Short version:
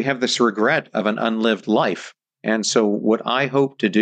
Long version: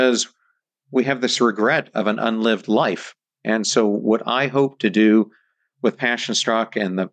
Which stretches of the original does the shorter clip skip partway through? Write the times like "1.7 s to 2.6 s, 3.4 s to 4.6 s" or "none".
none